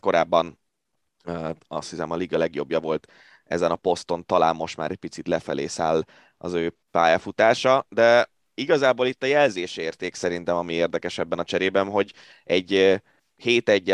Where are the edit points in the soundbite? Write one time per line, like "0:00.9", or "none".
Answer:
none